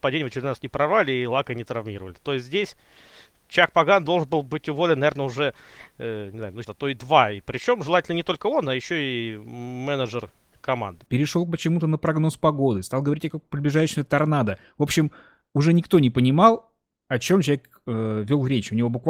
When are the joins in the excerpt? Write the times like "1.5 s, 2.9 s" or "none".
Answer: 6.6 s, 11.1 s